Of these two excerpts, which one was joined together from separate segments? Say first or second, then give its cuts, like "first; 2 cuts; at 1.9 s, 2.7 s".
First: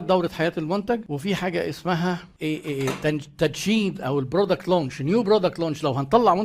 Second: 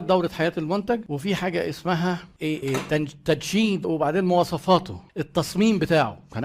second; 2 cuts; at 2.6 s, 3.8 s